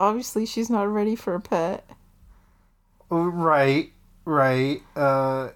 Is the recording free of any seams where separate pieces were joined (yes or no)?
yes